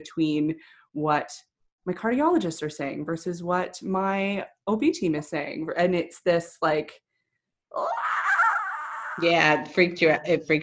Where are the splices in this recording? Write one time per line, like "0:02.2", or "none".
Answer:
none